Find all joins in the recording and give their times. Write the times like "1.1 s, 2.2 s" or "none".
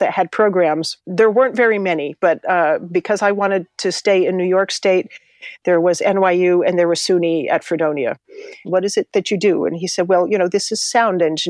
1.0 s, 8.6 s